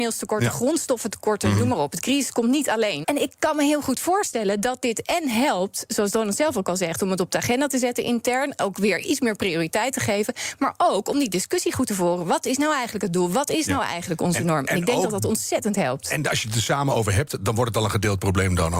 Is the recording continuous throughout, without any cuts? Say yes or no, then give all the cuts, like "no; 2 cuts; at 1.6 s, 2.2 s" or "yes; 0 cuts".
no; 1 cut; at 3.0 s